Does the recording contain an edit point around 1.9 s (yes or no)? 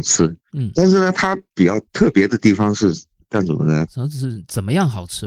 yes